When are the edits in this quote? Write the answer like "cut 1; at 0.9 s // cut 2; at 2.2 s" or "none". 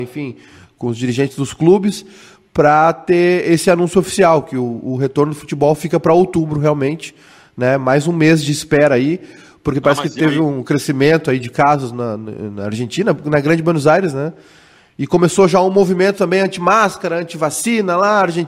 none